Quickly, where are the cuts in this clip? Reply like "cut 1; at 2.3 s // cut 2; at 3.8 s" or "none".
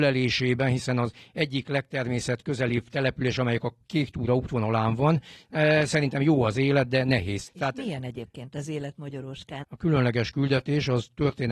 cut 1; at 7.5 s // cut 2; at 9.6 s